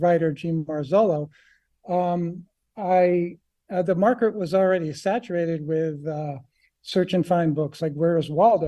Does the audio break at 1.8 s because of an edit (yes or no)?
no